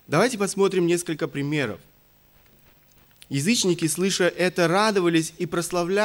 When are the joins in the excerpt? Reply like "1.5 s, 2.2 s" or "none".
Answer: 3.2 s